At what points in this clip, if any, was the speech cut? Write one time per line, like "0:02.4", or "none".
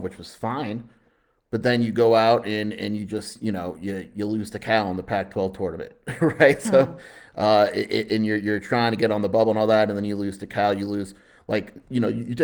none